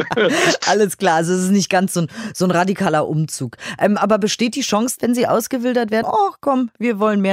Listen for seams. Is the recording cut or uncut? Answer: cut